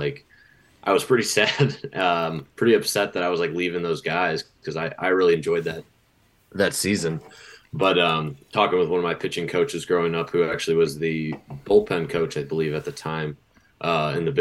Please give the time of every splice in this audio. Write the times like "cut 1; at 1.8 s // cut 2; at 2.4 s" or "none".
none